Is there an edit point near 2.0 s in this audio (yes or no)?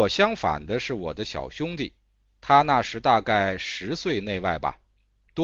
no